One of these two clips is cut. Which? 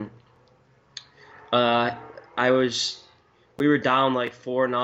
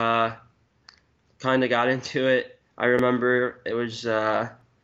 second; 1 cut; at 2.6 s

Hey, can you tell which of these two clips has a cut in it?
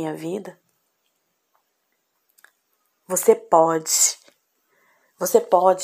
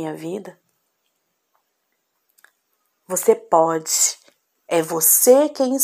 second; 1 cut; at 4.7 s

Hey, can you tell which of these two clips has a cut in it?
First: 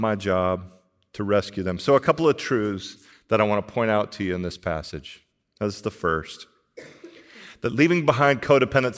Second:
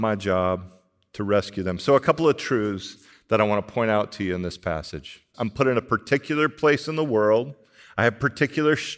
second; 1 cut; at 5.3 s

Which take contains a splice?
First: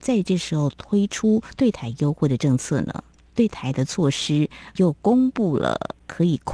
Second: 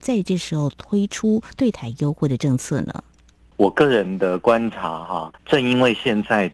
first; 1 cut; at 3.2 s

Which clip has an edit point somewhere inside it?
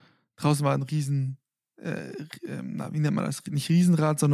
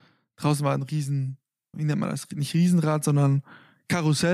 second; 1 cut; at 1.7 s

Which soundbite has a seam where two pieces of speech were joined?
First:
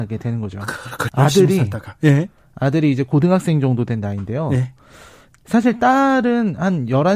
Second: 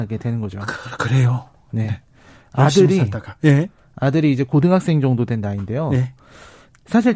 first; 1 cut; at 1.1 s

